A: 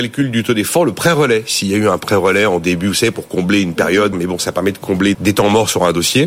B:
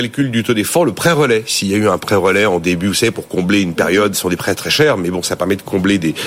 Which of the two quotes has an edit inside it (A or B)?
A